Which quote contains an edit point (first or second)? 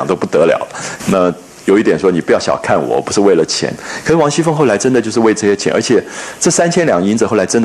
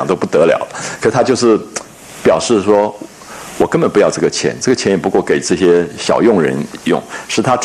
first